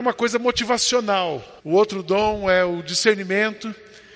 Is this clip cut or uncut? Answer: cut